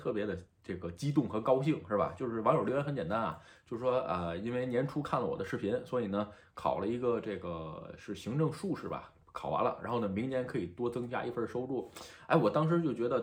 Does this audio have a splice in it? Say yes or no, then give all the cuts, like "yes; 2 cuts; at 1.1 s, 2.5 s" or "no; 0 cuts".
no; 0 cuts